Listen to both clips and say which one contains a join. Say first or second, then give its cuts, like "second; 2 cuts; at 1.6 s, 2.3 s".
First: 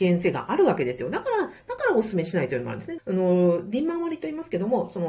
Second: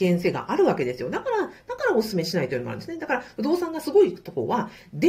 first; 1 cut; at 3.0 s